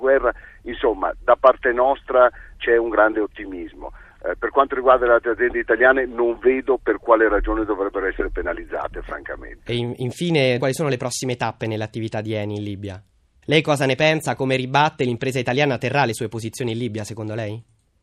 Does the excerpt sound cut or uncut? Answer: cut